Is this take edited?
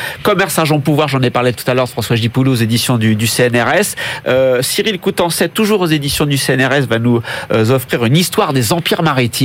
no; 0 cuts

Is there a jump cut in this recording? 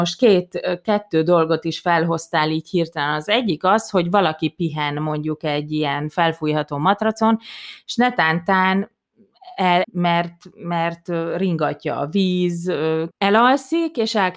yes; 2 cuts; at 9.8 s, 13.1 s

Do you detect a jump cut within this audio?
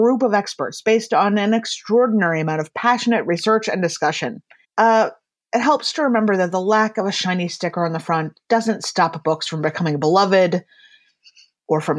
yes; 1 cut; at 4.6 s

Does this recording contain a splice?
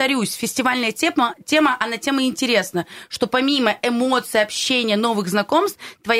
no; 0 cuts

